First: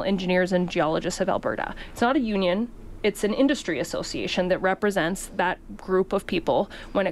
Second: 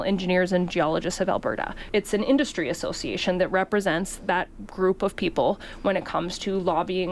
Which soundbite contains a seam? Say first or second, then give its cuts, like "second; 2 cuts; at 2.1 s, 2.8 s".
second; 1 cut; at 1.9 s